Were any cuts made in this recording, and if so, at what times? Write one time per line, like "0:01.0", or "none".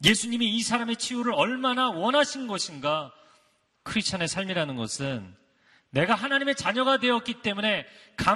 0:03.7